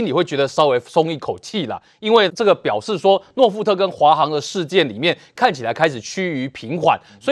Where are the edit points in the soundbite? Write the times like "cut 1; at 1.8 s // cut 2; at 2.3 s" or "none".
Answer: cut 1; at 2.3 s